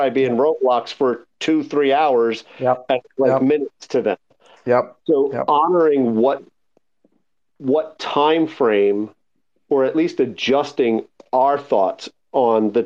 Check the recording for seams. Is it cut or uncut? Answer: uncut